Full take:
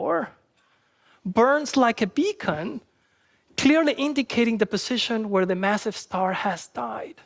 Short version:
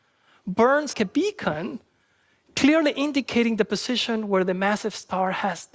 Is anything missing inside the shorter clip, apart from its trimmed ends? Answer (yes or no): yes